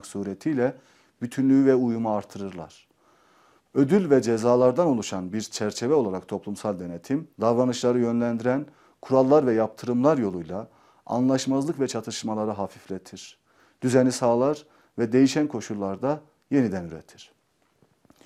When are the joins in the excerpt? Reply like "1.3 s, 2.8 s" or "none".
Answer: 3.7 s, 7.3 s